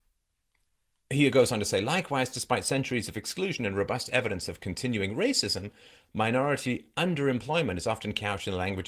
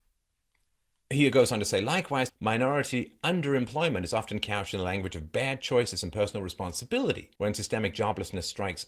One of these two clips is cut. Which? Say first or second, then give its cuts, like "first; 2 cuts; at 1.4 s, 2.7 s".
second; 2 cuts; at 2.3 s, 7.4 s